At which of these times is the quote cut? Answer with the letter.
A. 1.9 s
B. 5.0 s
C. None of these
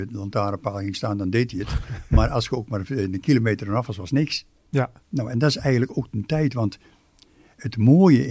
B